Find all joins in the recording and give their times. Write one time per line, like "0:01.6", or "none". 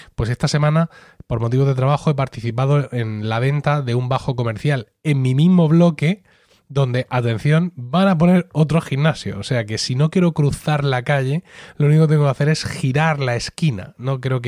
none